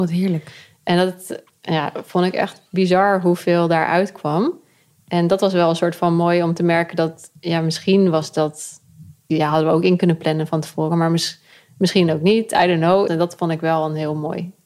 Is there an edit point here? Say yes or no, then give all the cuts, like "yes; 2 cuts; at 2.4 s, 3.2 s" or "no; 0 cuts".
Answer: yes; 2 cuts; at 9.3 s, 13.1 s